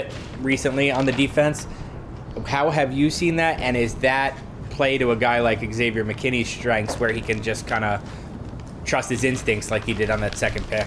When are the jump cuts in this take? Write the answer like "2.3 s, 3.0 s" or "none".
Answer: none